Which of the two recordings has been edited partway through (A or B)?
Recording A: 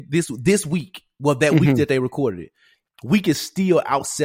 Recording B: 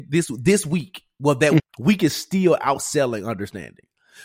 B